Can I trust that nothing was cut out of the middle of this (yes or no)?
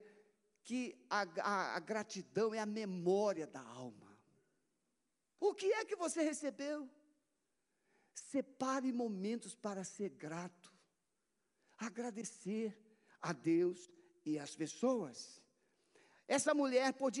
no